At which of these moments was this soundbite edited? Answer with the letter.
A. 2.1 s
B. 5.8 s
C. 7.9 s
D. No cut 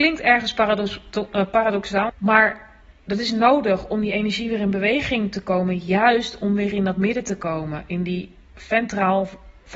A